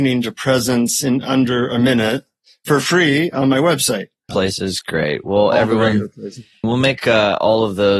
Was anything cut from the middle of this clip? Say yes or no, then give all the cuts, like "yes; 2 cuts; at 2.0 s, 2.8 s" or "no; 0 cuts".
yes; 2 cuts; at 4.3 s, 6.6 s